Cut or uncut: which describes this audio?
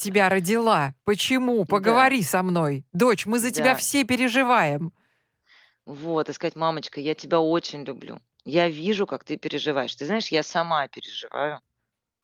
uncut